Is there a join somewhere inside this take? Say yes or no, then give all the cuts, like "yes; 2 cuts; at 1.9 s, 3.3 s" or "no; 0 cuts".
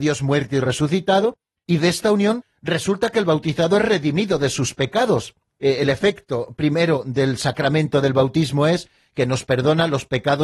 no; 0 cuts